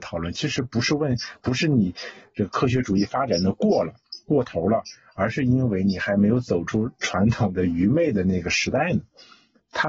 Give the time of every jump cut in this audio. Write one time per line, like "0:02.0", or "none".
none

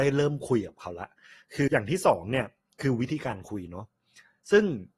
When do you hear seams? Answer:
0:01.7

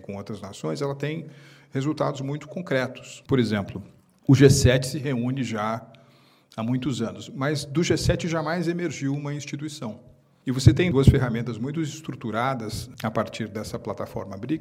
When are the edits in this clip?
none

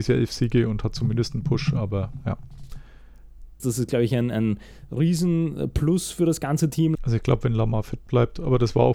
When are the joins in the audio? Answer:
0:03.6
0:06.9

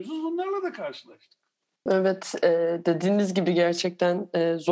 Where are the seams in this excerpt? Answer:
0:01.9

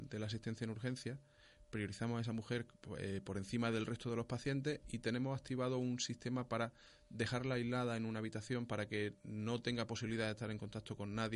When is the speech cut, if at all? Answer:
none

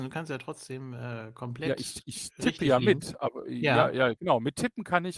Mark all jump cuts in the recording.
none

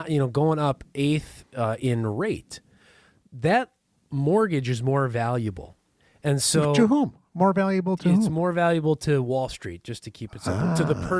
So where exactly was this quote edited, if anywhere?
none

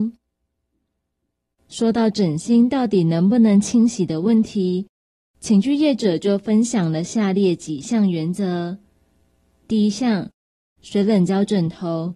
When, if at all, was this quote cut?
0:01.5
0:10.8

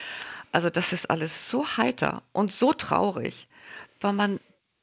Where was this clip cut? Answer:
none

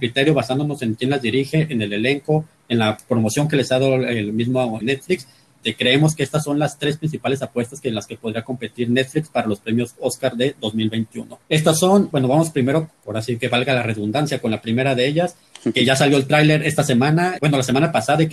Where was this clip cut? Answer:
0:04.8
0:11.4
0:17.4

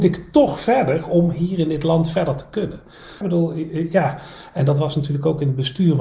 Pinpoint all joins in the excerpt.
0:03.2

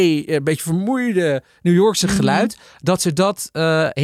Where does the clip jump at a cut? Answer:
none

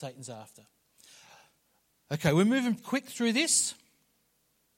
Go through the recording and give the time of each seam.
0:02.8

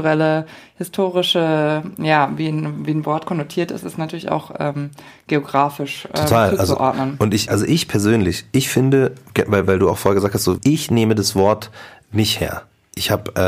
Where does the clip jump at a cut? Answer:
0:07.5
0:10.6

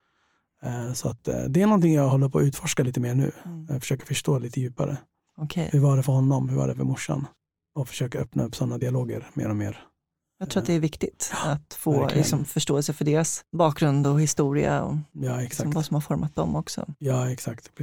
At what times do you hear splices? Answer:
none

